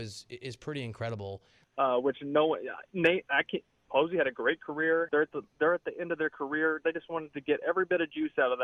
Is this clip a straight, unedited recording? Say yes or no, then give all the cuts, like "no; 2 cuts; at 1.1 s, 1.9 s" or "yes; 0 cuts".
no; 3 cuts; at 1.6 s, 3.9 s, 5.1 s